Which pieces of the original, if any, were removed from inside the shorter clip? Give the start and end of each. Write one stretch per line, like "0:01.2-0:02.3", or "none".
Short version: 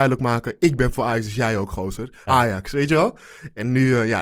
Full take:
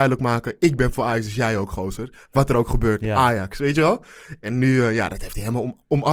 0:02.3-0:03.1